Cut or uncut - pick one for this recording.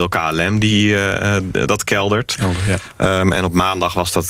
uncut